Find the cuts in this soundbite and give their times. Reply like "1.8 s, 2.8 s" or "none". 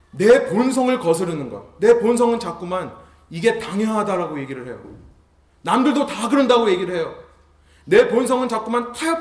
none

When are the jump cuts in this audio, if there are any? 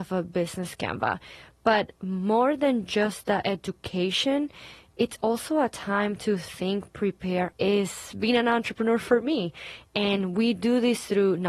7.5 s

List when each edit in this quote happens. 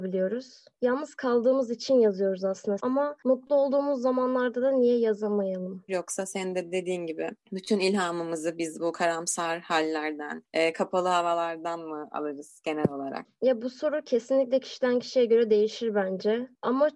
2.8 s, 5.9 s

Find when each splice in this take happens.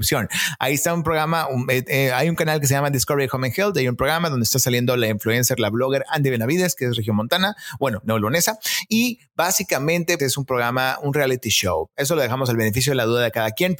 10.2 s, 11.9 s

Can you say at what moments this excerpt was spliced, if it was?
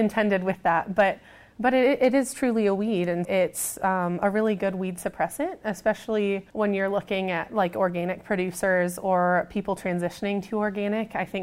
3.2 s, 6.5 s

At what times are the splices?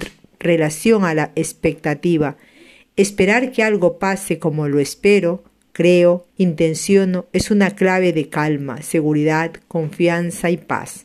6.3 s

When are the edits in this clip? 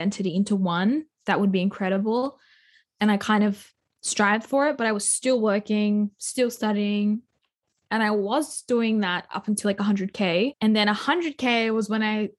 none

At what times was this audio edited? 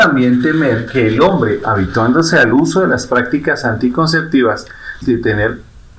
5.0 s

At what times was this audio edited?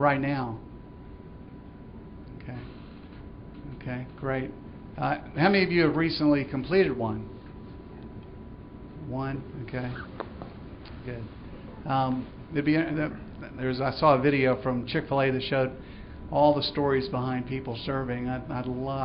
none

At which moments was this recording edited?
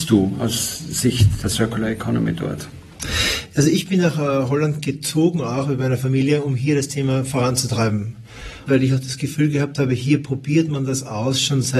none

